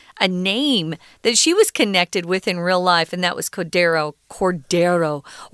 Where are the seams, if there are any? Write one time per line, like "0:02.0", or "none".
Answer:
none